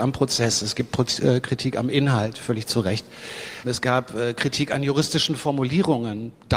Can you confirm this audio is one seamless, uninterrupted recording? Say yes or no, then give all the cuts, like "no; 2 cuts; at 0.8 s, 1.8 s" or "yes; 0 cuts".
no; 1 cut; at 3.6 s